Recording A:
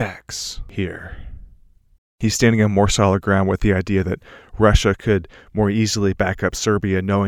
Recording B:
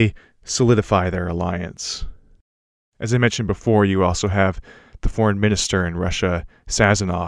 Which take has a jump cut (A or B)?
A